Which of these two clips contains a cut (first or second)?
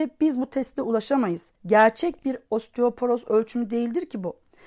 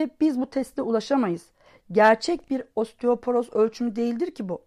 first